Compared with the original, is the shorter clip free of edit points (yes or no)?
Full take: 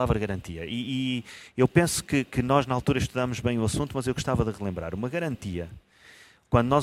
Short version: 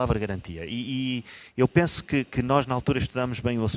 yes